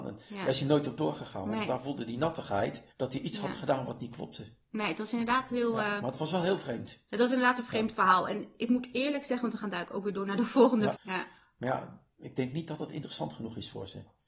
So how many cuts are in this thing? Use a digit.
2